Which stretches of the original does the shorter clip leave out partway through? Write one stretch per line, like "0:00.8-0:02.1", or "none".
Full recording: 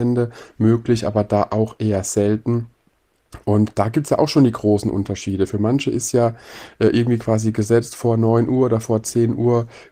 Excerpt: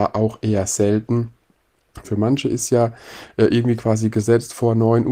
0:03.4-0:05.5